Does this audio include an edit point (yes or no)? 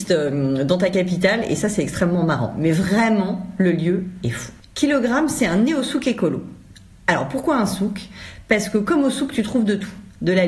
yes